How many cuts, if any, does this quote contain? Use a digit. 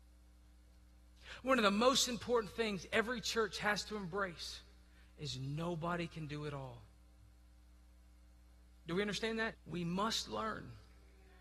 1